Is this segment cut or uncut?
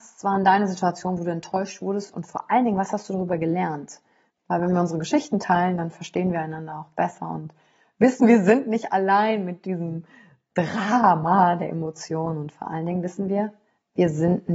cut